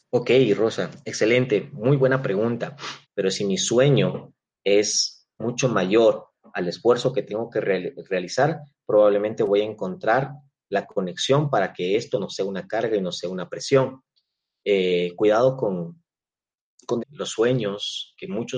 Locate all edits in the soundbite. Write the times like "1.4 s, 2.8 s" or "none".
3.0 s, 17.0 s

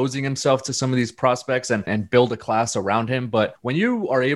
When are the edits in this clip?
1.9 s

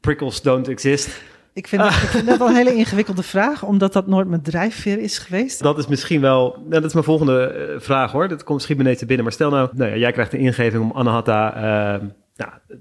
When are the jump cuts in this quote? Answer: 5.6 s, 9.7 s

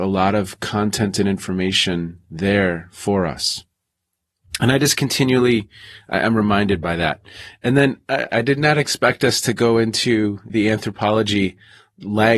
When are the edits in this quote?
8.3 s, 10.5 s

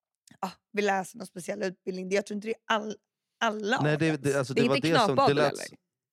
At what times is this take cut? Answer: none

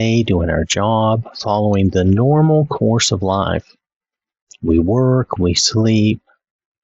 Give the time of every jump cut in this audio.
5.4 s

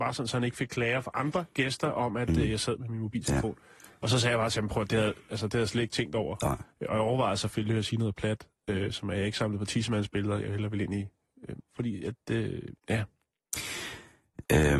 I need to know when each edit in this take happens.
11.6 s, 12.8 s

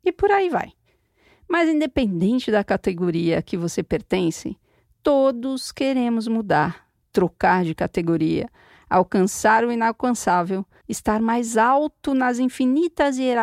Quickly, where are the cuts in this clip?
10.8 s

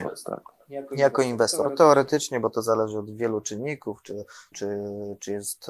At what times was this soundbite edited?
4.5 s

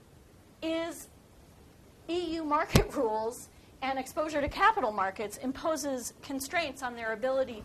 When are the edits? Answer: none

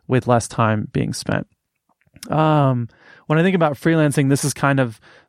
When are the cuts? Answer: none

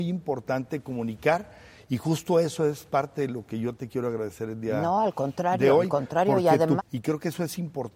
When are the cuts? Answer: 6.8 s

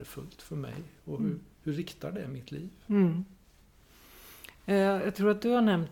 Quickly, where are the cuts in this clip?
none

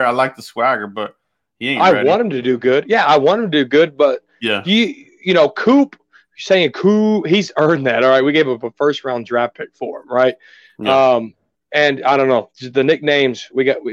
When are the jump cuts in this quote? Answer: none

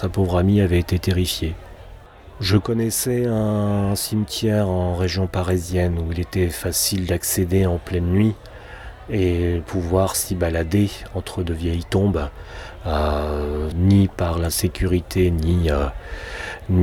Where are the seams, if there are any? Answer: 13.7 s

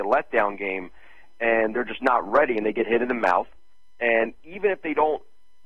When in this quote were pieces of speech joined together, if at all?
none

